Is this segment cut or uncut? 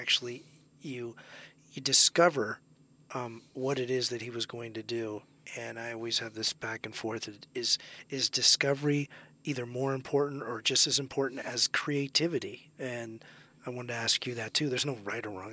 uncut